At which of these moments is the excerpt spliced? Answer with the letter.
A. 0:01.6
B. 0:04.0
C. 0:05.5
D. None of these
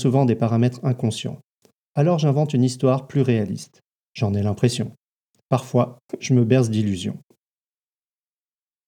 B